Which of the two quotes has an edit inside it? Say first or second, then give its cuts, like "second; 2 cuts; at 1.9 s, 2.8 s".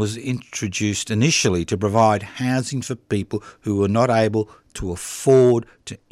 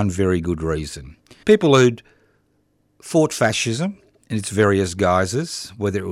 second; 1 cut; at 1.4 s